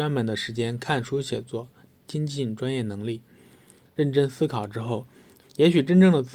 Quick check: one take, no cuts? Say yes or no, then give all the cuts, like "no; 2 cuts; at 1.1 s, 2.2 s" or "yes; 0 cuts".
no; 2 cuts; at 3.8 s, 5.4 s